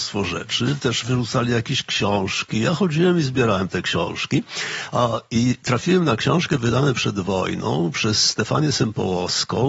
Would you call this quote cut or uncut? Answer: uncut